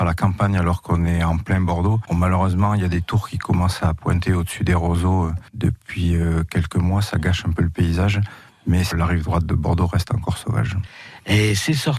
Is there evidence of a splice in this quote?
yes; 1 cut; at 2.1 s

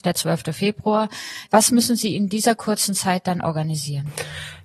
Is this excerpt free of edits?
no; 1 cut; at 1.5 s

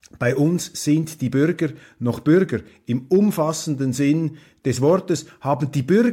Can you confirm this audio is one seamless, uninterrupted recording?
yes; 0 cuts

